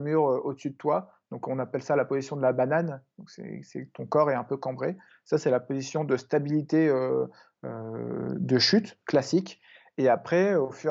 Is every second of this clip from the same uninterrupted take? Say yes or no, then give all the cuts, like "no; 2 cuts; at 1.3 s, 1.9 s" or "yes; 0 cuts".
yes; 0 cuts